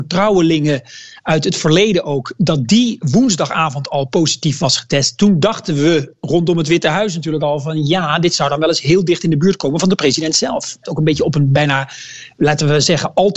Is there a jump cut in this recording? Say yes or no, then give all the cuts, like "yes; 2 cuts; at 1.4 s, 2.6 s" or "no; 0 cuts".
yes; 1 cut; at 10.8 s